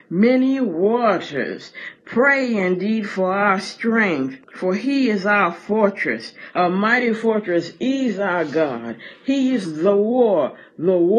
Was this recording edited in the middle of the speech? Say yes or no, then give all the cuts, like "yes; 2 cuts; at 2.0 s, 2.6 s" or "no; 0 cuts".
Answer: yes; 2 cuts; at 4.4 s, 6.5 s